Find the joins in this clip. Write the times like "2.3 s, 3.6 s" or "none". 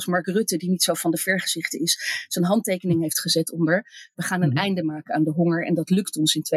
none